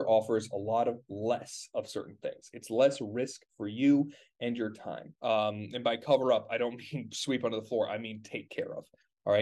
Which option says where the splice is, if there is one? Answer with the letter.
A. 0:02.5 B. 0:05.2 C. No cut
B